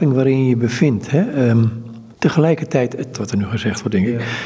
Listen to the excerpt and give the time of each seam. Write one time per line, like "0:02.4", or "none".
0:02.1
0:03.1